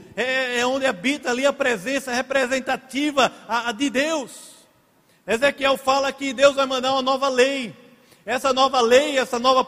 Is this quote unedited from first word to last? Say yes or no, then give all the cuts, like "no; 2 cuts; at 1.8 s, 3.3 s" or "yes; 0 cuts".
yes; 0 cuts